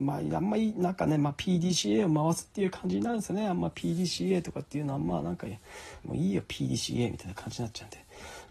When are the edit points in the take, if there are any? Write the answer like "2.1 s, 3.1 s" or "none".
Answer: 6.0 s